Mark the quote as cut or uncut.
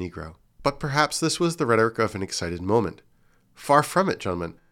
uncut